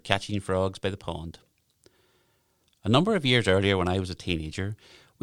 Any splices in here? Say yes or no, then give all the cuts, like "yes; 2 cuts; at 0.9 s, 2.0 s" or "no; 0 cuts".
yes; 1 cut; at 2.7 s